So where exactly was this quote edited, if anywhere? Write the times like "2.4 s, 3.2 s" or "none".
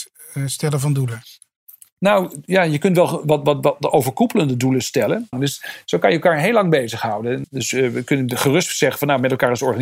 5.3 s, 7.4 s